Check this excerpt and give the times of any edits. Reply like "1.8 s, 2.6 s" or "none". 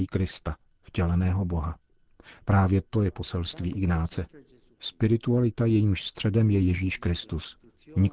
none

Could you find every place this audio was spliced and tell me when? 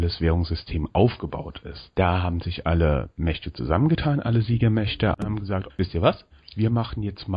1.9 s, 5.7 s

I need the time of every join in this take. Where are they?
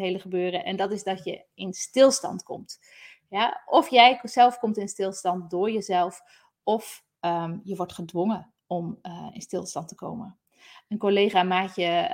none

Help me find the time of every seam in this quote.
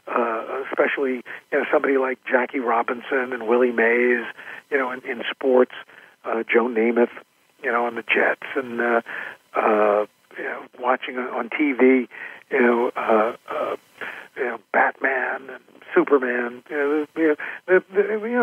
none

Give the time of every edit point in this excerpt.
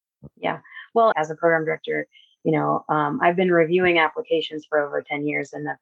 1.1 s

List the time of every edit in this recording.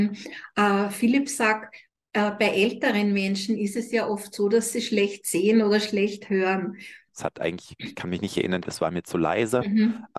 7.1 s, 8.6 s

